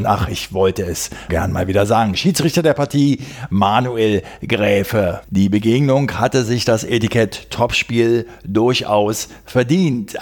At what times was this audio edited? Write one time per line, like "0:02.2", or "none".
0:01.3
0:05.2

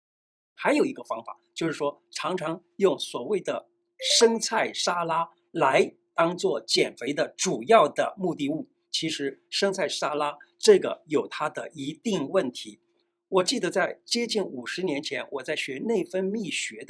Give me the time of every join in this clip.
none

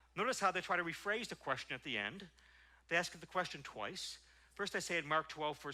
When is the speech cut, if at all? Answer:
none

